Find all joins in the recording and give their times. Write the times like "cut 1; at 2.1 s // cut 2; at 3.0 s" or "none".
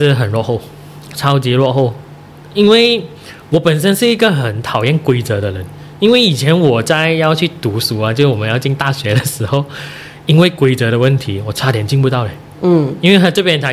cut 1; at 1.1 s